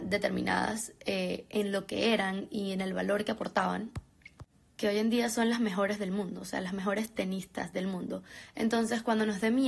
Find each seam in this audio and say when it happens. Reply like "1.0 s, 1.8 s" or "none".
none